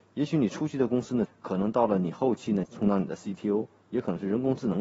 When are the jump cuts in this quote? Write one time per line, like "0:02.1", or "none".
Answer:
0:01.3
0:02.6